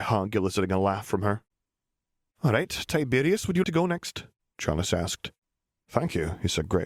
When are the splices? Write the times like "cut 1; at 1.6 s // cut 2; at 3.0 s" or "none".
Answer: cut 1; at 3.6 s // cut 2; at 5.8 s